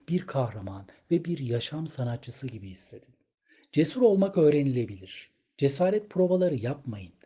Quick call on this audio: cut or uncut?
uncut